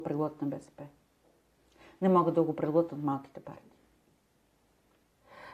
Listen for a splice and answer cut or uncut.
uncut